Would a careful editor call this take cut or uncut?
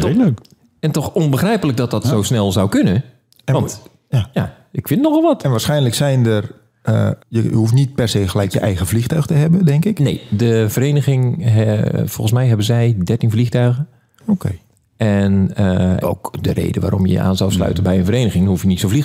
cut